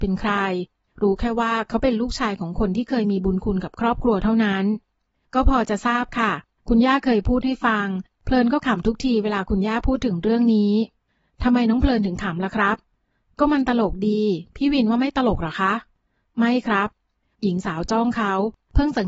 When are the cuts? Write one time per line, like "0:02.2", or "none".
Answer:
none